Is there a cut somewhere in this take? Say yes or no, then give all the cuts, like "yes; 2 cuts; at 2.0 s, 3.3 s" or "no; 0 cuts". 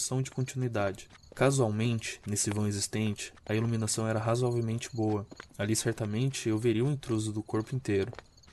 no; 0 cuts